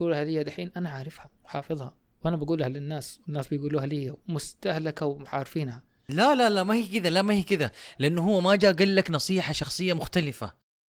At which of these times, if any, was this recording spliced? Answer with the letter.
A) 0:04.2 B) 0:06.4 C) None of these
A